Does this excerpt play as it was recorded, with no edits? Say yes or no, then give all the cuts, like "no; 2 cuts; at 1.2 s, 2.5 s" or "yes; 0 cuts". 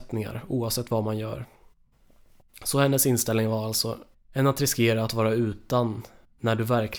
no; 1 cut; at 4.1 s